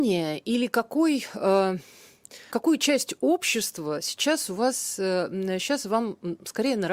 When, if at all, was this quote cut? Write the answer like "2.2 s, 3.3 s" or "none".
2.5 s